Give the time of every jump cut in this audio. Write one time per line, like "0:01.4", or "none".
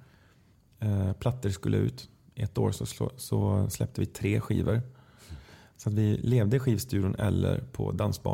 none